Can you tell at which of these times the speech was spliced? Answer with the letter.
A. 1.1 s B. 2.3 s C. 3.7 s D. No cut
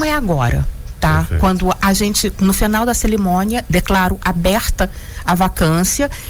C